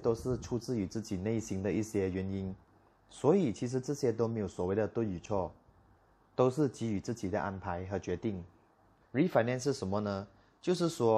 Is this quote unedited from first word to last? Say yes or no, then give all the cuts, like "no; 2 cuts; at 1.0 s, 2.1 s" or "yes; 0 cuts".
no; 1 cut; at 9.0 s